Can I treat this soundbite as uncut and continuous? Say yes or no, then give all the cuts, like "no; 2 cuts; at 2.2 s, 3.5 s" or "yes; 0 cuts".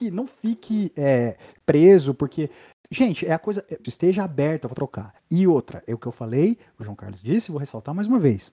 no; 1 cut; at 3.8 s